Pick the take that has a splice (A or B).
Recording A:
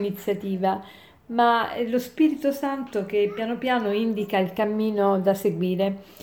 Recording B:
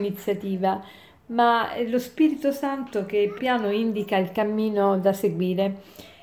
B